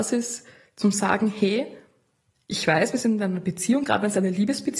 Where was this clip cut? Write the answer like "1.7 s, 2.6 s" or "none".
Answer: none